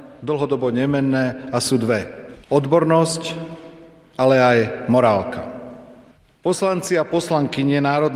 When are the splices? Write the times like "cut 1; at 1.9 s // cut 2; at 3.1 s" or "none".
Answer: cut 1; at 2.4 s